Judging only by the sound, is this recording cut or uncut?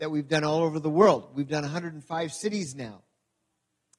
uncut